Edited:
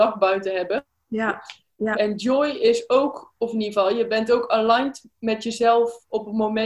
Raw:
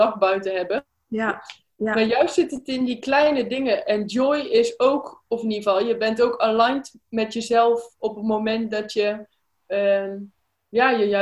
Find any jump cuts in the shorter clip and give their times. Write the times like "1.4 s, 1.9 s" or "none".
1.9 s